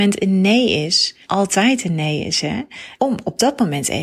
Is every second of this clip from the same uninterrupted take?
no; 2 cuts; at 1.2 s, 3.0 s

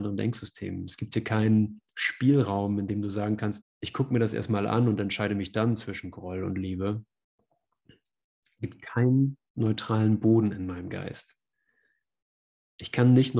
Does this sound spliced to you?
yes; 1 cut; at 3.6 s

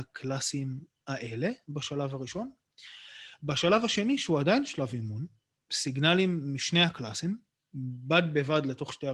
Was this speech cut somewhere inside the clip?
yes; 1 cut; at 5.5 s

